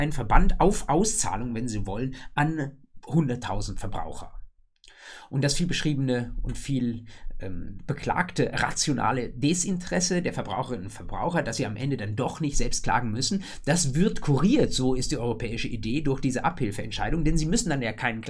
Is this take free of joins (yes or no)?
yes